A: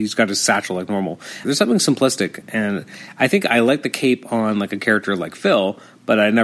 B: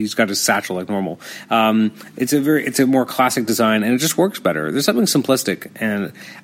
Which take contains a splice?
A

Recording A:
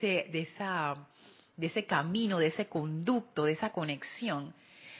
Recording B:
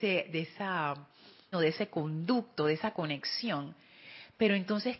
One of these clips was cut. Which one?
B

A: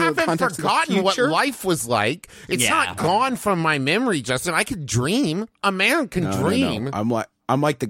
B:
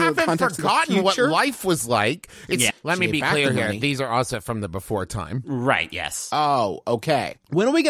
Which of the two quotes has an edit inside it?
B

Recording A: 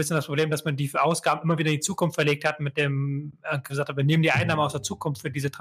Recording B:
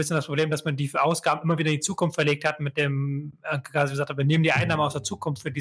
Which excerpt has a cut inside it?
A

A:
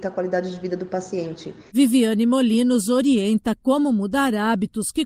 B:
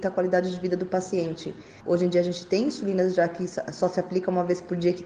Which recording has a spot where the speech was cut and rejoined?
A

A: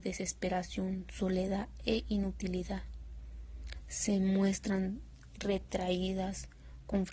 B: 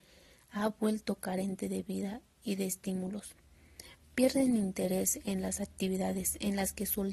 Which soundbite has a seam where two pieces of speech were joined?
A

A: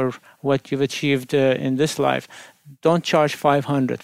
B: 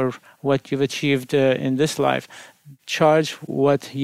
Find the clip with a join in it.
B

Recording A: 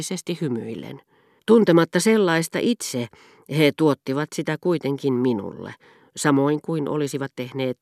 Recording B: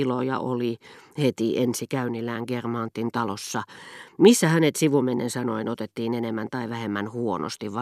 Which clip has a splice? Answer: A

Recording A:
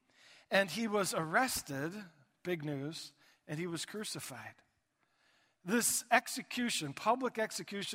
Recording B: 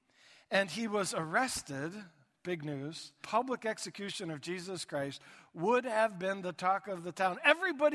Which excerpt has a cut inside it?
B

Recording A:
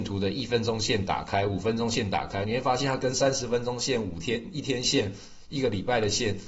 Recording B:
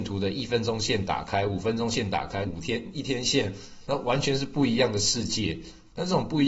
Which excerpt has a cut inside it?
B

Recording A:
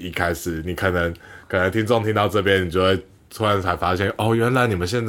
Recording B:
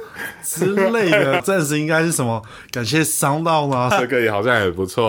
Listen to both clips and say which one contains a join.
B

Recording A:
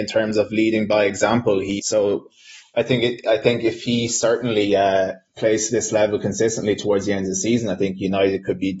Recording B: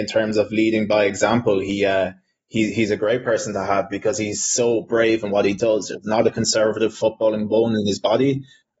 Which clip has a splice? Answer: A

